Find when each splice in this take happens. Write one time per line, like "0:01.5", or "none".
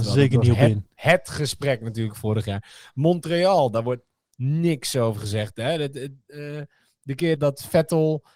0:07.3